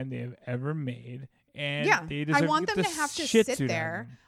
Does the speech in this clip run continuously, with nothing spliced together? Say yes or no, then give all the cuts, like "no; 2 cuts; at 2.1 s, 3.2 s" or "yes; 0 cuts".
yes; 0 cuts